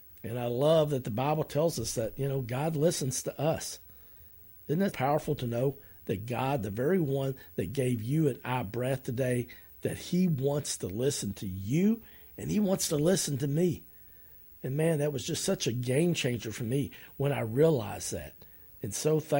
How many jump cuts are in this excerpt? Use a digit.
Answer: 1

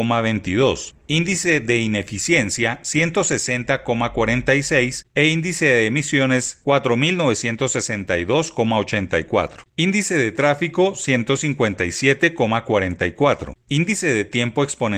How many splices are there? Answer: 2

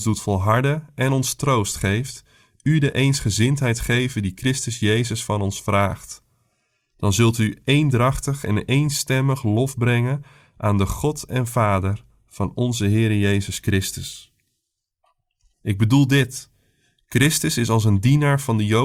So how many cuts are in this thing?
1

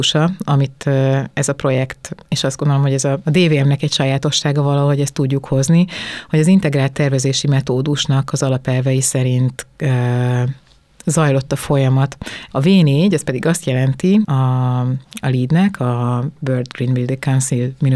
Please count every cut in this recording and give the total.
2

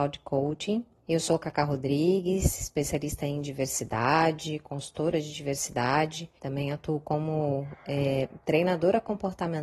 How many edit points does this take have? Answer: 2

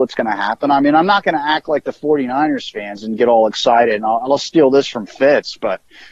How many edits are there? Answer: 0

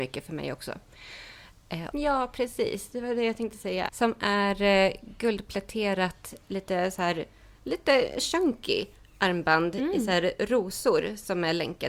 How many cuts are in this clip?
2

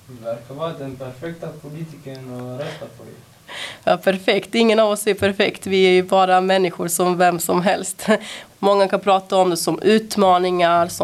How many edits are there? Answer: 1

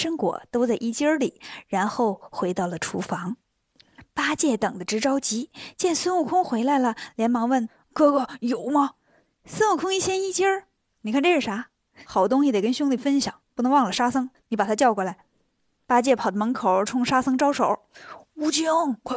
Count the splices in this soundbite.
0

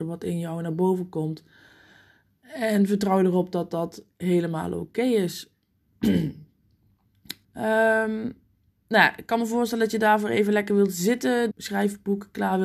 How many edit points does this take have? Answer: 2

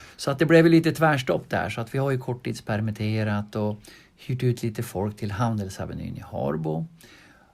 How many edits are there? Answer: 0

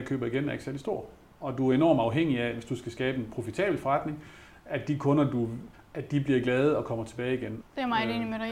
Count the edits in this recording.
2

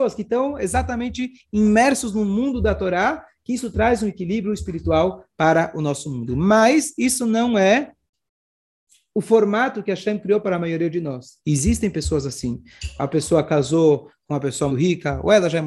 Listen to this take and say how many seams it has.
2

